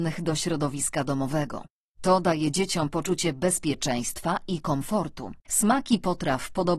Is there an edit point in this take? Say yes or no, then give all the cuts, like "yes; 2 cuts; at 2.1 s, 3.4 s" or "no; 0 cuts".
yes; 1 cut; at 5.4 s